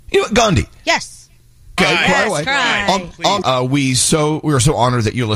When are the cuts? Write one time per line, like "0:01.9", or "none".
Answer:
0:01.8
0:03.4